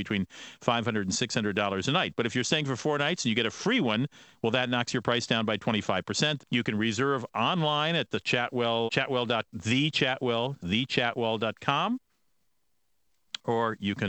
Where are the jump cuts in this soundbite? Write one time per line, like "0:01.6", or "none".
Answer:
0:06.4
0:08.9
0:10.6